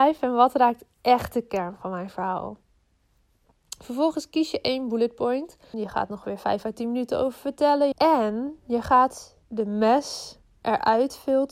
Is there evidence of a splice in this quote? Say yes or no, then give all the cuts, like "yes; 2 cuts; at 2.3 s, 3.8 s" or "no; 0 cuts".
yes; 3 cuts; at 5.7 s, 7.9 s, 9.4 s